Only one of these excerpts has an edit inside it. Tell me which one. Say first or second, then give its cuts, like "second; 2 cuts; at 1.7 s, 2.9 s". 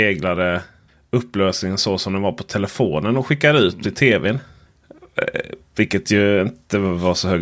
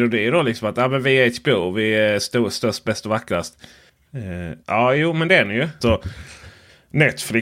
second; 2 cuts; at 4.6 s, 5.8 s